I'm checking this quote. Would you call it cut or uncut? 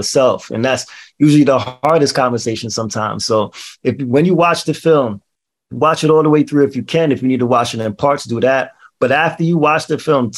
uncut